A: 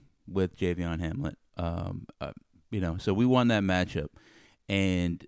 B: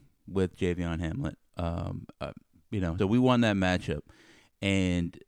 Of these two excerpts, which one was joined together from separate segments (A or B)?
B